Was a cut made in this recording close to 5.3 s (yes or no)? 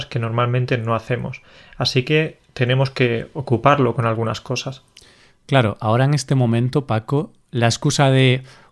no